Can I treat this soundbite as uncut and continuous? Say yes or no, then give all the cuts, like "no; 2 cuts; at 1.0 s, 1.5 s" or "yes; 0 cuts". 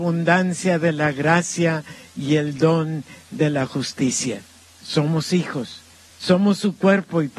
no; 2 cuts; at 4.6 s, 6.1 s